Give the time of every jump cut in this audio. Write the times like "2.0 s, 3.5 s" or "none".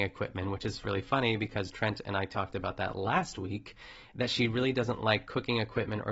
none